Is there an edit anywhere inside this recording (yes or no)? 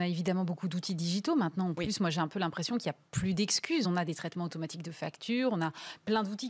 no